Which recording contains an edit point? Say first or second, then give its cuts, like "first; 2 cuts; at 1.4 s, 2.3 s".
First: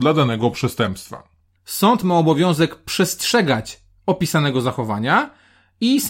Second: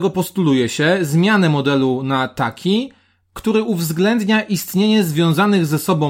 first; 1 cut; at 1.6 s